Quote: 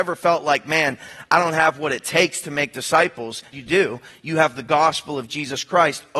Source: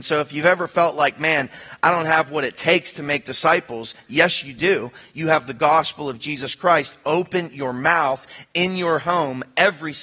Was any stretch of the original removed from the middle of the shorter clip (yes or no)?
yes